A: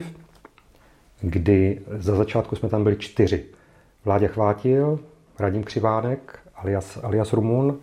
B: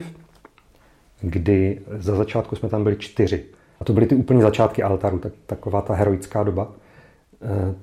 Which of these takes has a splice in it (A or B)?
B